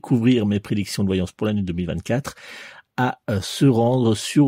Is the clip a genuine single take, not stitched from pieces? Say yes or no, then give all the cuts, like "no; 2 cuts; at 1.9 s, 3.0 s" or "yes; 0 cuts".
yes; 0 cuts